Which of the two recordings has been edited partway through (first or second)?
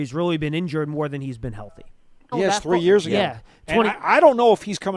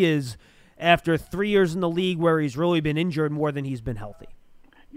first